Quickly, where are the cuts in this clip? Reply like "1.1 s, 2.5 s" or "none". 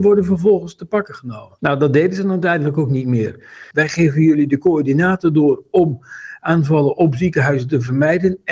1.6 s, 3.7 s